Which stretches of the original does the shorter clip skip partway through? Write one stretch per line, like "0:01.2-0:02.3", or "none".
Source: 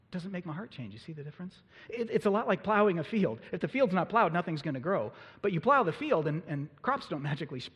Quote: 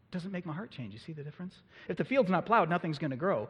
0:01.9-0:03.5